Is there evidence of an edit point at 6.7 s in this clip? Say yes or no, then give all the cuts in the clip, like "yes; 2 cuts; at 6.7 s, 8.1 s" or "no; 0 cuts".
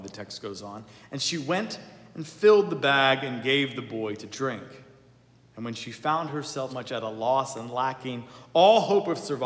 yes; 2 cuts; at 5.4 s, 6.7 s